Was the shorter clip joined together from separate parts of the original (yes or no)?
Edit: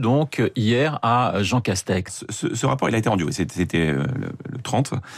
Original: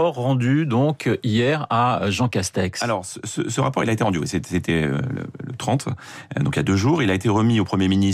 yes